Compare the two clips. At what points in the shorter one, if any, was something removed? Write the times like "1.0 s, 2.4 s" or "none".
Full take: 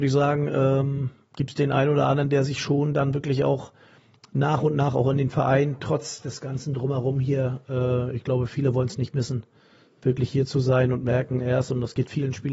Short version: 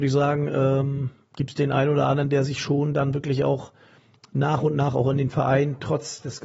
none